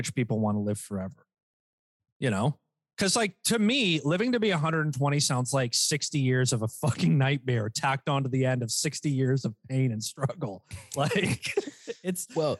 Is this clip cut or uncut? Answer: uncut